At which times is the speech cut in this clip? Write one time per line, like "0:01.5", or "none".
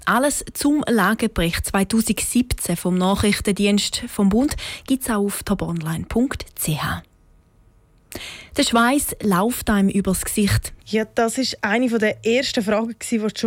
0:10.8